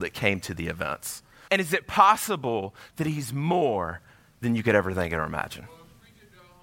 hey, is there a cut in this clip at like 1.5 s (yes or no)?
yes